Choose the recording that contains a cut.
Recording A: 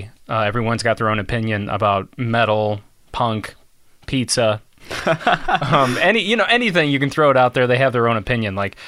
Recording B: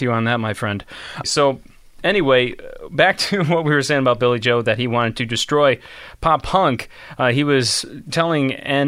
B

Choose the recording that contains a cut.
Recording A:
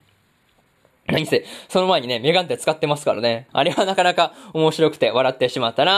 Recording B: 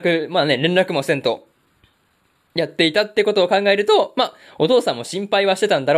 A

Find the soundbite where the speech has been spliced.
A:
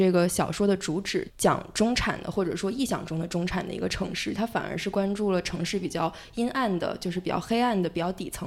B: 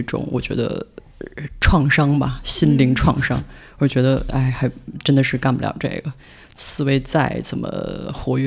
A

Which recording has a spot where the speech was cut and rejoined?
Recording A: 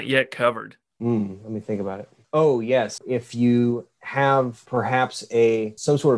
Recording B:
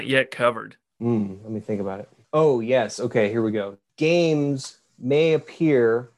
A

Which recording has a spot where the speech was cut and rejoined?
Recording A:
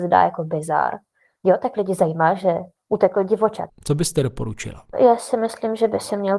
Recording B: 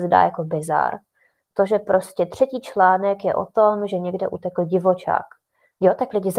A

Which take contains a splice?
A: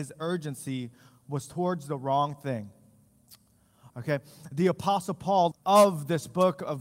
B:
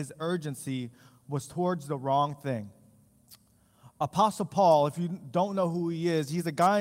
A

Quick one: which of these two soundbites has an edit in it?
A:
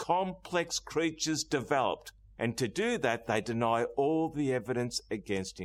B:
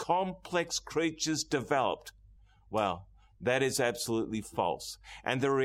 A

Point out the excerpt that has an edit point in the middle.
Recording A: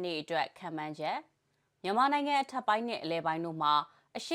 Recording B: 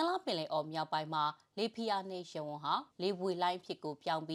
B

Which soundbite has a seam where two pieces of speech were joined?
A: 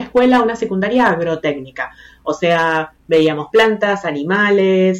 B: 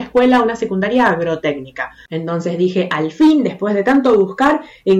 B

